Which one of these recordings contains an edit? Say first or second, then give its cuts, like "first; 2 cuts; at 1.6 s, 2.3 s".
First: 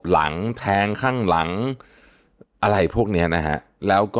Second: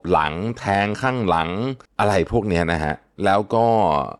second; 1 cut; at 1.9 s